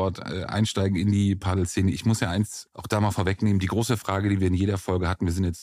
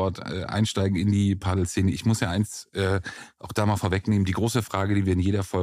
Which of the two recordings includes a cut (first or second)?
first